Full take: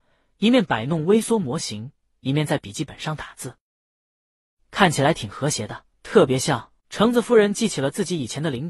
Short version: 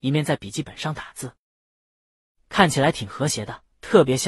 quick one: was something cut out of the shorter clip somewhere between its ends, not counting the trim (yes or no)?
no